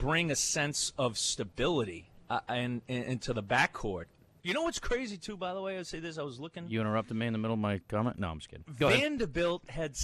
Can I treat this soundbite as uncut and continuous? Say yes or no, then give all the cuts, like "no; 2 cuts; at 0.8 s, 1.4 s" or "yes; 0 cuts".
no; 1 cut; at 4.4 s